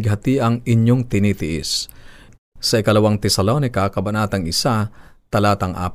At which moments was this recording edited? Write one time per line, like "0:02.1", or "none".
0:02.3